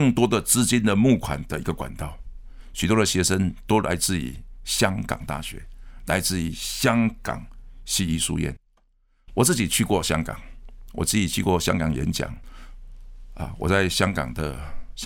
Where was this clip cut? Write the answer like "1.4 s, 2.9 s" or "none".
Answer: none